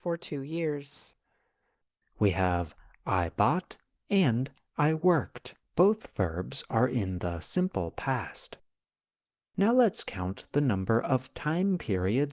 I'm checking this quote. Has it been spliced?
yes; 2 cuts; at 2.0 s, 5.6 s

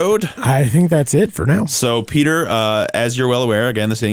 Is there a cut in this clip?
no; 0 cuts

